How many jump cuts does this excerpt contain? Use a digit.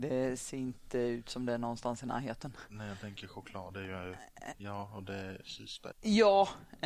2